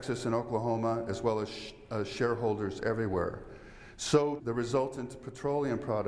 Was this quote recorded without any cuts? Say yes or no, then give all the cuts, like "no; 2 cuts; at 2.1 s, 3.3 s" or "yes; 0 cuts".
no; 1 cut; at 4.4 s